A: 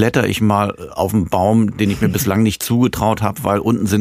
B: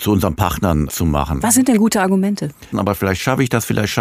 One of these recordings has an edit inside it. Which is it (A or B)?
B